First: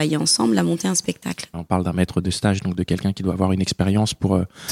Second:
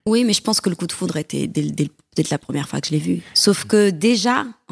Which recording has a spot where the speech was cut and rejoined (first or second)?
first